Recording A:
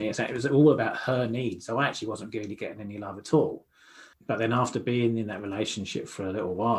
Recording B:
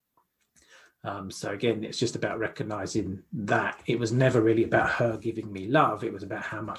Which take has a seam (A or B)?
A